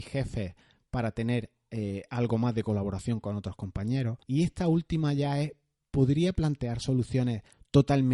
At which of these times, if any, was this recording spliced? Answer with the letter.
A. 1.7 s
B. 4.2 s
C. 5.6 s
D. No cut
B